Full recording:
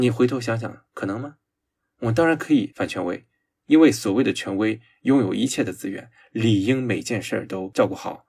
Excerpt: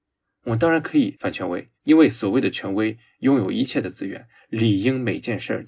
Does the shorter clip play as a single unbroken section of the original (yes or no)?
no